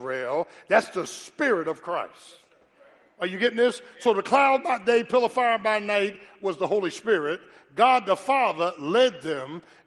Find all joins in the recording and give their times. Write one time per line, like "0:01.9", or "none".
none